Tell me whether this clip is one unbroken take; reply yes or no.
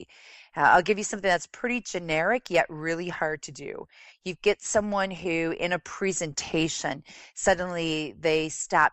yes